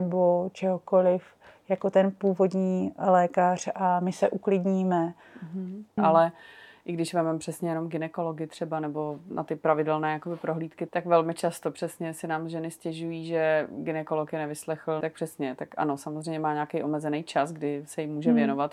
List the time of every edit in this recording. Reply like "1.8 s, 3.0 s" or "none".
6.0 s, 10.9 s, 15.0 s